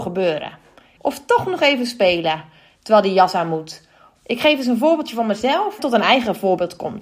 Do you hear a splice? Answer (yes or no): yes